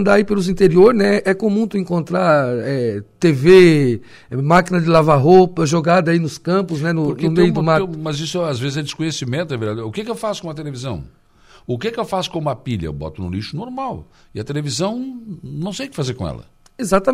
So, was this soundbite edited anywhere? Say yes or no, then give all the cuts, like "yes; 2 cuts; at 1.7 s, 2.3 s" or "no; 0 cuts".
no; 0 cuts